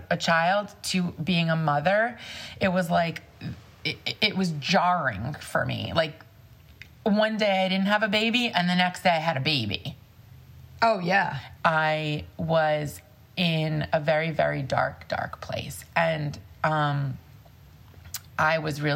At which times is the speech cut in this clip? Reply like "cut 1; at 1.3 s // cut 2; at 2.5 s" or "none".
cut 1; at 11.6 s

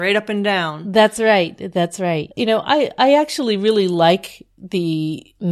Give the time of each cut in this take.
cut 1; at 2.3 s

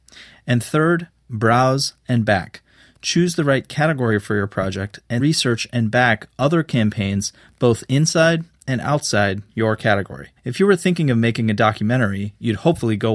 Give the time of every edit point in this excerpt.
cut 1; at 5.2 s // cut 2; at 10.4 s

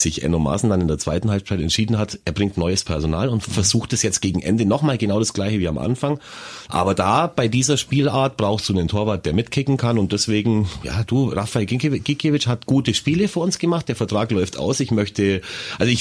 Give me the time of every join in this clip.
cut 1; at 6.7 s

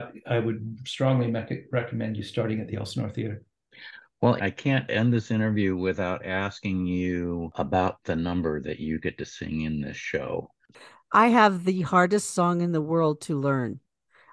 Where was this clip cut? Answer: cut 1; at 4.4 s

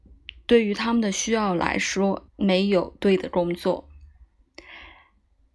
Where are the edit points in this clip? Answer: cut 1; at 2.3 s

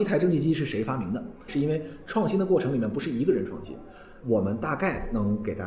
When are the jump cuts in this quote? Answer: cut 1; at 1.5 s // cut 2; at 4.2 s

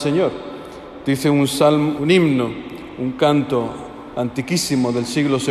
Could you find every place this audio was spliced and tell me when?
cut 1; at 2.0 s

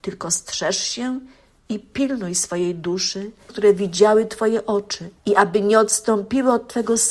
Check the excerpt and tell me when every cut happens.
cut 1; at 3.5 s // cut 2; at 5.2 s

